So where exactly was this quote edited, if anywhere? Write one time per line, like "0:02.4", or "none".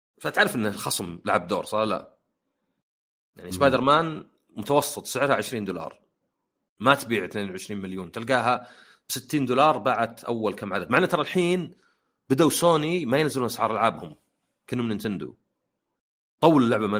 none